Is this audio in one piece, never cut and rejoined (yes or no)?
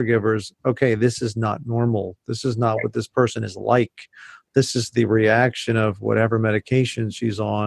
yes